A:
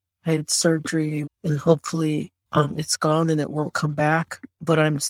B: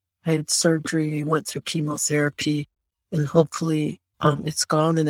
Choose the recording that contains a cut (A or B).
A